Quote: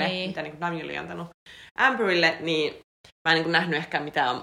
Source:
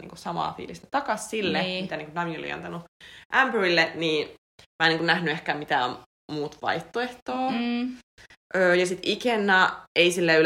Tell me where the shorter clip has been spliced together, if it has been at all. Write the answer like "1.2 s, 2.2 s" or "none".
none